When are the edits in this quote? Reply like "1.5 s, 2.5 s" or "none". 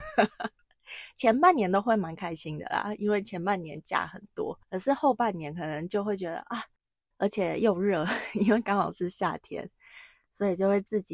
4.6 s, 7.1 s